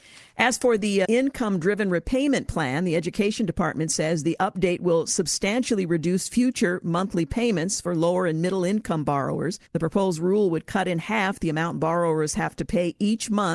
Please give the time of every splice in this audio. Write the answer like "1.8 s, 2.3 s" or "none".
1.0 s, 9.7 s